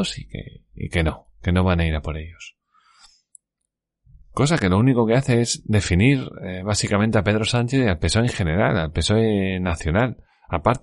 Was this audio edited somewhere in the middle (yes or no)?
no